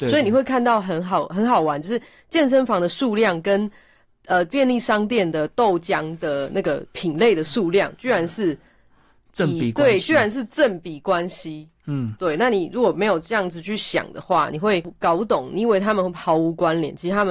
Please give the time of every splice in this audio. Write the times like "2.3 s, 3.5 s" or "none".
none